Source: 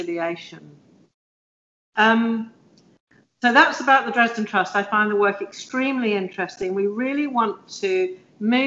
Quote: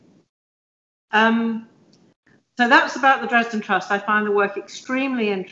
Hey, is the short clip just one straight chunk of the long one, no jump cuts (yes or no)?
yes